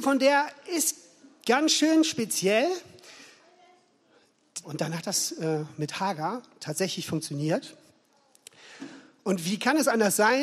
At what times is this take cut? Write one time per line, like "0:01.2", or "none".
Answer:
0:04.6

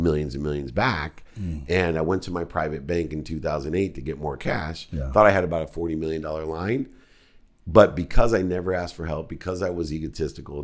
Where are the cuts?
none

